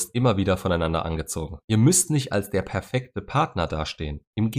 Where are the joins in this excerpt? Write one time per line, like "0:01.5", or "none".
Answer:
0:01.6